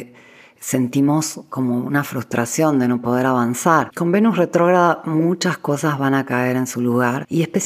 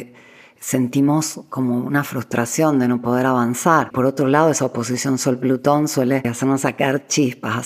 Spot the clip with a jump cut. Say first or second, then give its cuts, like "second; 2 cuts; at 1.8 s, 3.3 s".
first; 1 cut; at 3.9 s